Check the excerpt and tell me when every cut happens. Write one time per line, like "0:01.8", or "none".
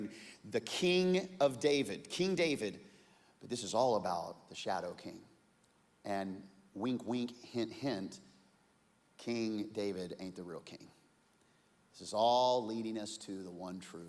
none